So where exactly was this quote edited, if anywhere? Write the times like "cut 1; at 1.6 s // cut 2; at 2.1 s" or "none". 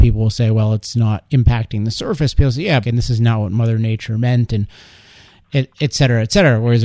cut 1; at 2.8 s